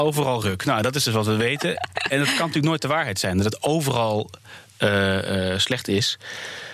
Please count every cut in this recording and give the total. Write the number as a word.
zero